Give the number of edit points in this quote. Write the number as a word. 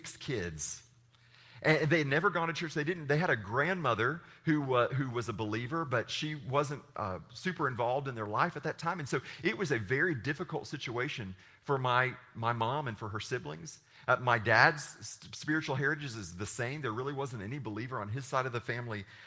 zero